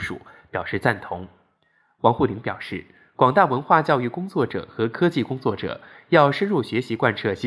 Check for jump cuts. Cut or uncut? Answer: uncut